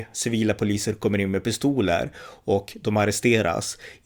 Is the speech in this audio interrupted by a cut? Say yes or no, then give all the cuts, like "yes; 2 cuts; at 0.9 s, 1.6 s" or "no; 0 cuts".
no; 0 cuts